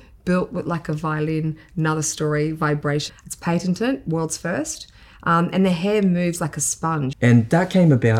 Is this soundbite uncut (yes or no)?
no